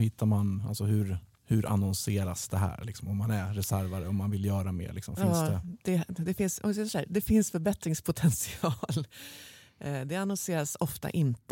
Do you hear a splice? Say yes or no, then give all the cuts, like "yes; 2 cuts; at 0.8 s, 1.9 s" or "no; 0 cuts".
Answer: no; 0 cuts